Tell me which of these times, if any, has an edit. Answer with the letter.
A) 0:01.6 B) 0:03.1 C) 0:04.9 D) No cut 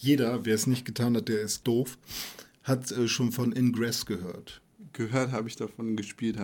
A